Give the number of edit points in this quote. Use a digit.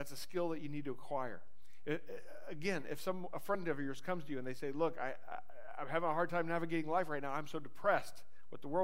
0